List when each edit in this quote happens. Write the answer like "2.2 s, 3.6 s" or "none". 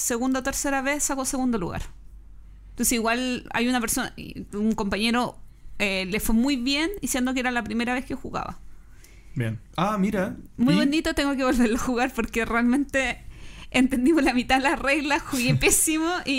9.7 s